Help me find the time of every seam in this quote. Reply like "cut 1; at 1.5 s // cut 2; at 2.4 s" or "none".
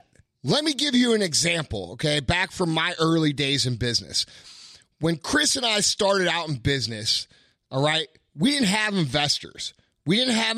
none